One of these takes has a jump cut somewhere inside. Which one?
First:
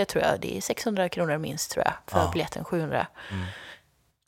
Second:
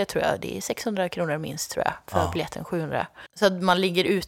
second; 1 cut; at 3.3 s

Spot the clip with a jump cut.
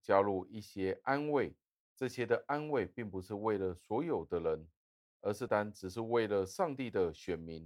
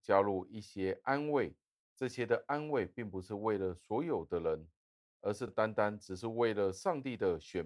first; 1 cut; at 5.5 s

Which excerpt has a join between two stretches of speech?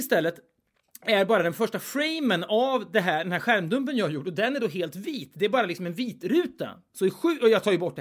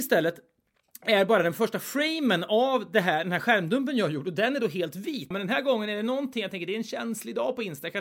second; 1 cut; at 5.3 s

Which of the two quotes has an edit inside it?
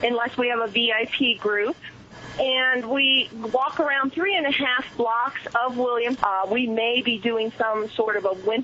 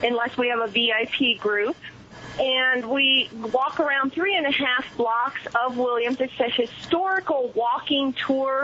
first; 1 cut; at 6.2 s

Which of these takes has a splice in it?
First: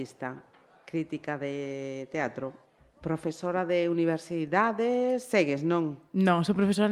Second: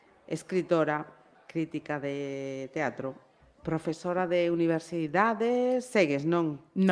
second; 1 cut; at 1.3 s

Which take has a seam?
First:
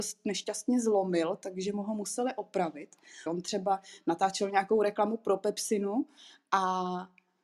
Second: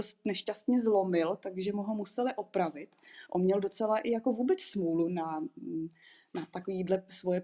first; 1 cut; at 3.3 s

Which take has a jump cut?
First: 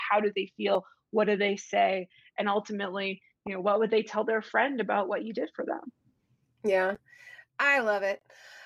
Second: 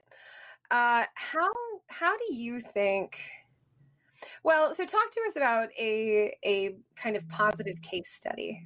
first; 1 cut; at 7.5 s

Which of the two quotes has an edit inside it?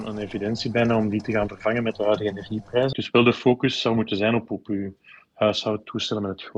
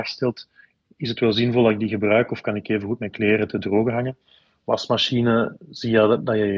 first; 1 cut; at 2.9 s

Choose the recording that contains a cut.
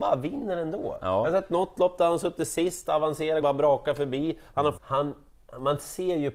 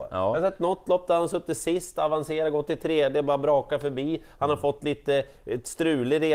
first; 2 cuts; at 3.4 s, 4.8 s

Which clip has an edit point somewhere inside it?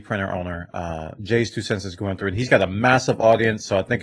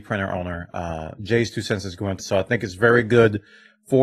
second; 1 cut; at 2.2 s

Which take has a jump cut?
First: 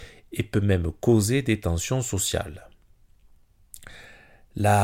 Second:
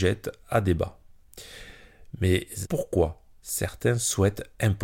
second; 1 cut; at 2.6 s

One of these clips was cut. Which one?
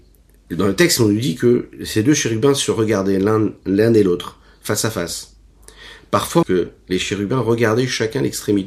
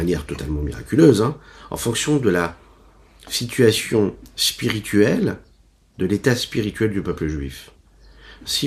first; 1 cut; at 6.4 s

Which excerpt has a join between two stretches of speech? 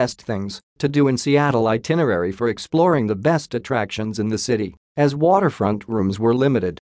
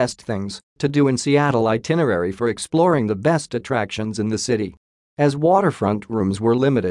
first; 1 cut; at 4.8 s

